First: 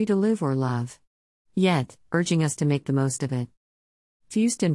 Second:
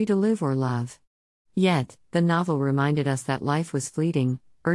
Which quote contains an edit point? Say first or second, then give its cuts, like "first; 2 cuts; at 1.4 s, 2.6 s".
first; 1 cut; at 2.0 s